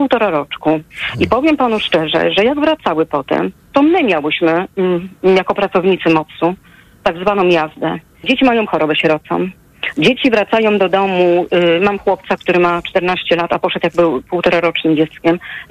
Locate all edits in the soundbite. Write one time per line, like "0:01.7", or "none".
0:08.2